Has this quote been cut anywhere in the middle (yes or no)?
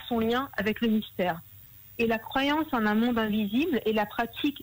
no